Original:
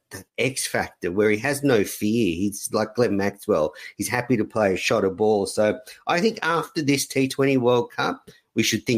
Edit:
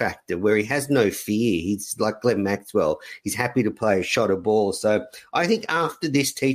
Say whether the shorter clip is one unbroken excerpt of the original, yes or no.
yes